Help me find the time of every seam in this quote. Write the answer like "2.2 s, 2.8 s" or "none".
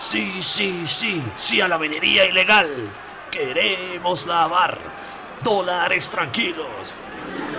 none